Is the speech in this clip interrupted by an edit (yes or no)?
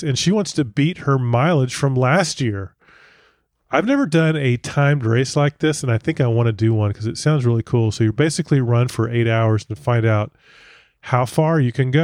no